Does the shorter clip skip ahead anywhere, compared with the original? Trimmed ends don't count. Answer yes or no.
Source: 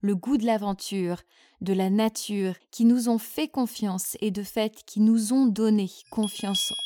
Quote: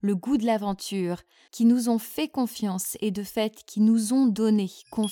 yes